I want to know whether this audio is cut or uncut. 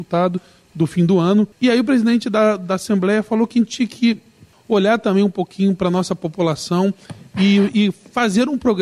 cut